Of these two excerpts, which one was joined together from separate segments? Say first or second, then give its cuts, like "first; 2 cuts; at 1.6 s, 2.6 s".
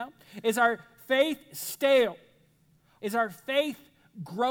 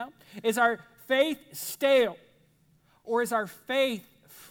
first; 1 cut; at 3.0 s